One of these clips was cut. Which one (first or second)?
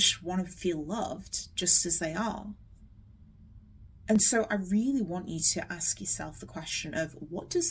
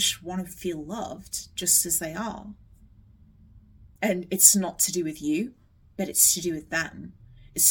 second